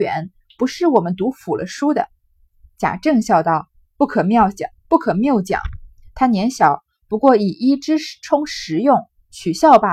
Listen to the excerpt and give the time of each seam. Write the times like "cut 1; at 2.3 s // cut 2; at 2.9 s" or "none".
none